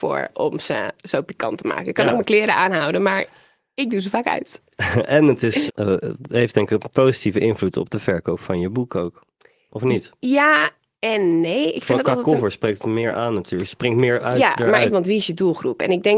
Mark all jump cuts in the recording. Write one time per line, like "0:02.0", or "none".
0:05.7
0:14.9